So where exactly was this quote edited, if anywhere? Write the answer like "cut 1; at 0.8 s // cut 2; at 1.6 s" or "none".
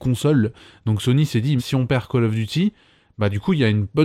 cut 1; at 1.6 s